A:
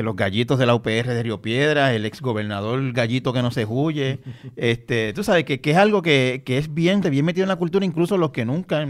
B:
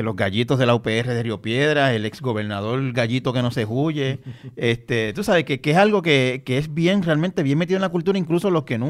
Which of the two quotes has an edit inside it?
A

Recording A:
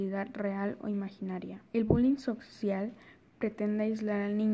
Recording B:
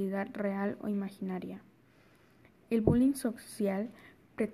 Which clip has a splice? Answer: A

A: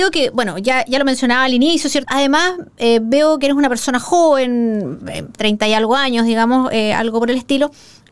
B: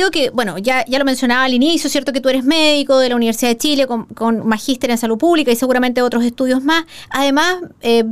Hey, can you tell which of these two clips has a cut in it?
A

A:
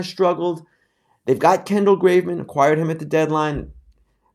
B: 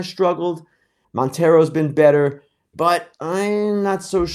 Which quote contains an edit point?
B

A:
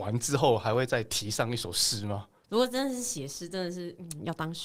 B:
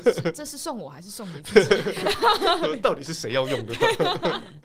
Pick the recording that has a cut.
A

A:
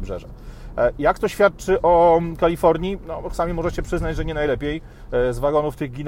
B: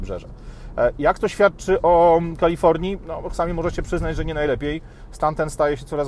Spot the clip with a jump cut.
A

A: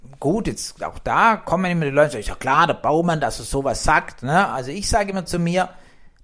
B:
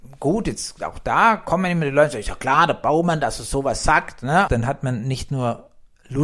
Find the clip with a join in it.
B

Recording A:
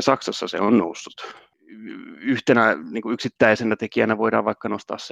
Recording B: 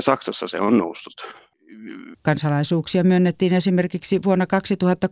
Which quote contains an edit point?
B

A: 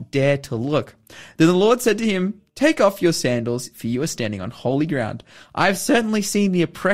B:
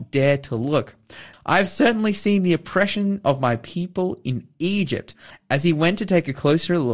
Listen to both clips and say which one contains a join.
B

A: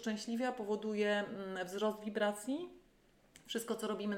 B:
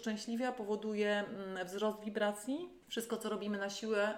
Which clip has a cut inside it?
B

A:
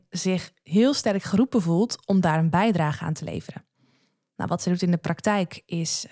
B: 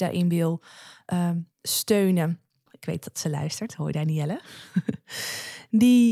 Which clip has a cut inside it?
B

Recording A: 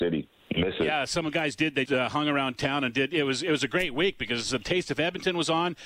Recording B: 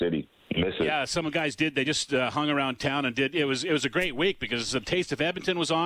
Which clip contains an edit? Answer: A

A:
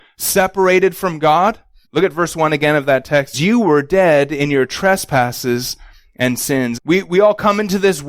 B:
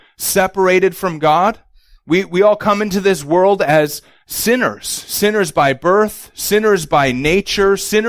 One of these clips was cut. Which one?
A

